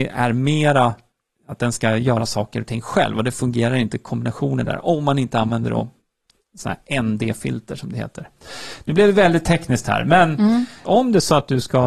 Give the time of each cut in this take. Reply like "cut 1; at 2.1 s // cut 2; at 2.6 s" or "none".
cut 1; at 10.8 s